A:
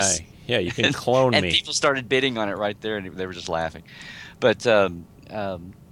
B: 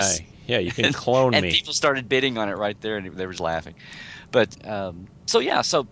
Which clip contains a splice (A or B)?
B